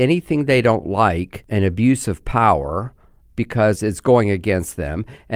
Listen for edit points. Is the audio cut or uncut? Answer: cut